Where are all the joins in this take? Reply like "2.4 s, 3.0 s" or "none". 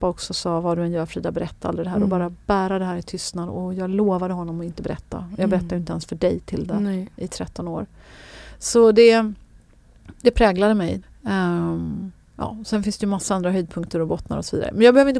11.0 s